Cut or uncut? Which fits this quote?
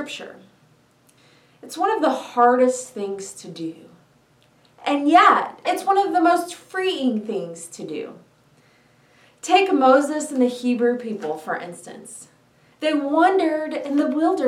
cut